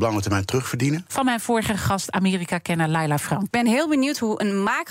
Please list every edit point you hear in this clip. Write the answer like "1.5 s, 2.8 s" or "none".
1.1 s, 3.5 s